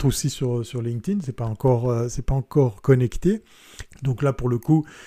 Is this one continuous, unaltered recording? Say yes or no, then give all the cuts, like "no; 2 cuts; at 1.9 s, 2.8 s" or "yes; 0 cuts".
no; 1 cut; at 3.9 s